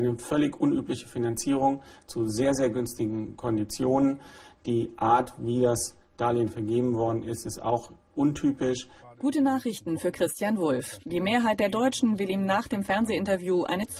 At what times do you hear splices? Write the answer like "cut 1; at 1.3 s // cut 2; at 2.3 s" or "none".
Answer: cut 1; at 9.0 s